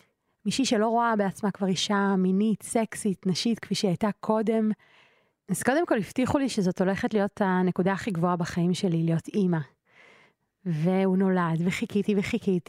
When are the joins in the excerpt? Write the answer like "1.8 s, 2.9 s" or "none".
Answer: 5.3 s